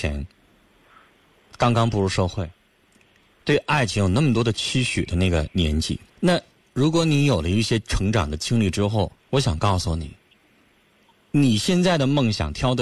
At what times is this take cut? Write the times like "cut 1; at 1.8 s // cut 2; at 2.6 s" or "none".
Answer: cut 1; at 6.1 s // cut 2; at 9.2 s